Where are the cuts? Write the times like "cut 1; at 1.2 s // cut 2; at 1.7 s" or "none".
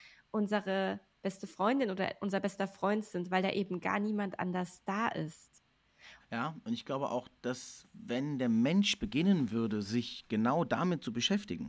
cut 1; at 6.2 s